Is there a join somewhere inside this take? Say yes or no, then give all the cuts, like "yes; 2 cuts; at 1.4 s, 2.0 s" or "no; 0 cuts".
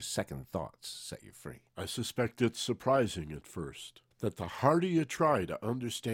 yes; 2 cuts; at 1.7 s, 4.1 s